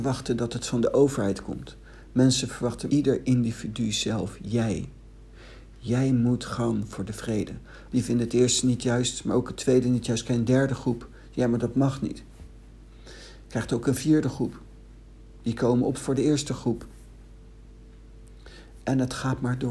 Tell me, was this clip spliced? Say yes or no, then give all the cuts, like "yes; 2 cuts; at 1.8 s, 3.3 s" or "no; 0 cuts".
yes; 2 cuts; at 2.9 s, 7.9 s